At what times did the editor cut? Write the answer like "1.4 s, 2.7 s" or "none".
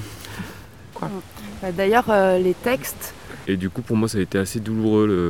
0.9 s, 3.4 s